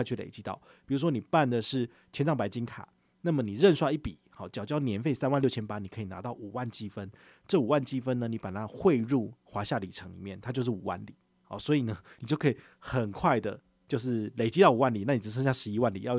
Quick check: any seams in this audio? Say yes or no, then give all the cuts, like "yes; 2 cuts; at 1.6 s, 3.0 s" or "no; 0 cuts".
no; 0 cuts